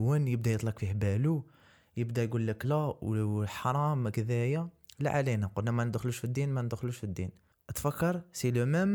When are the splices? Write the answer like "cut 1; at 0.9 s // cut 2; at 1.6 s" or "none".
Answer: cut 1; at 2.6 s